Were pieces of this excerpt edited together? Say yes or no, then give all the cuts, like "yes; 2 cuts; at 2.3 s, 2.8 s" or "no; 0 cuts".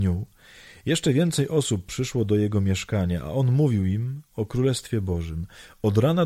no; 0 cuts